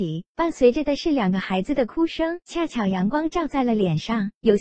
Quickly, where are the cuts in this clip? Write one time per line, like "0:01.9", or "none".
0:02.4